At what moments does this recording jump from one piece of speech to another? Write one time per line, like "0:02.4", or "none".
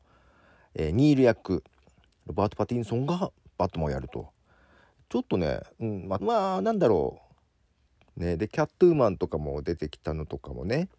0:06.2
0:08.1